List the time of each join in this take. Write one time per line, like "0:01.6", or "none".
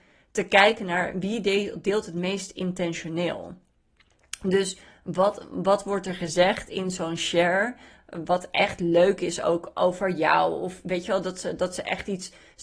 none